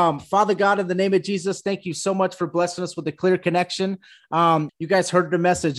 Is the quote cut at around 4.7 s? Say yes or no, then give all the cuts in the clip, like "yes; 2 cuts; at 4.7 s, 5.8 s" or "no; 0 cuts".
yes; 1 cut; at 4.7 s